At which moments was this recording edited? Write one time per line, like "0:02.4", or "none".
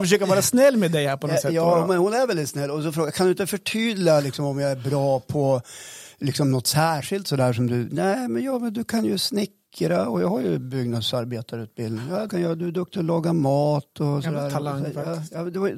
0:12.3

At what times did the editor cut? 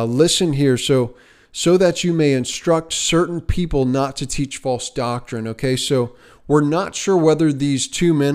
none

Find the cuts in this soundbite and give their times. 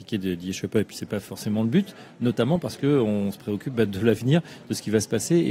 none

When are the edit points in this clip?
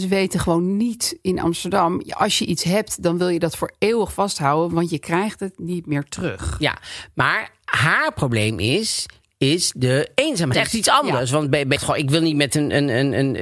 0:10.5
0:11.8

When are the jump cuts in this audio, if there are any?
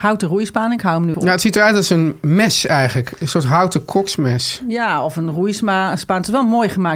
0:01.1

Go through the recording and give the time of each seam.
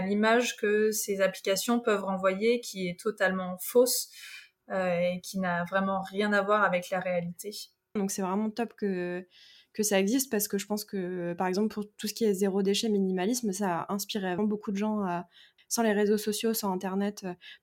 0:08.0
0:14.4
0:15.6

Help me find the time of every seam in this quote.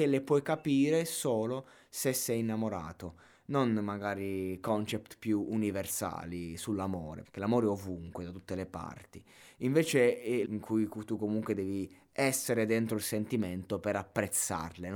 0:07.2
0:10.4

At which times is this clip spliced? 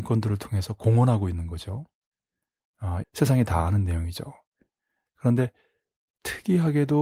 0:03.0

